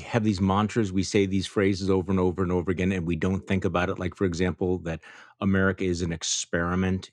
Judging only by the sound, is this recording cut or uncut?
uncut